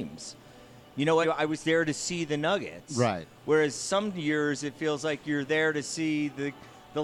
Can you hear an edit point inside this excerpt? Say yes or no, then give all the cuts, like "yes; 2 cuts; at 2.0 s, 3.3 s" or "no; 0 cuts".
yes; 1 cut; at 1.2 s